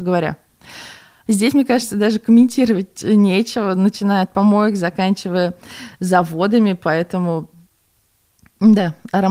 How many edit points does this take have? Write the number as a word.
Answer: one